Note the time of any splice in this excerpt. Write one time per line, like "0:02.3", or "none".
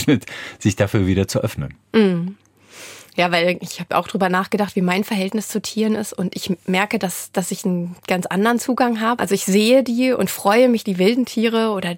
0:09.2
0:10.8